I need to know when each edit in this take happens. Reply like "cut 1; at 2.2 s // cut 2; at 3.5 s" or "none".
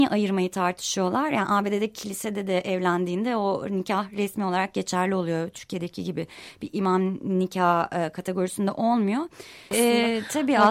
cut 1; at 9.7 s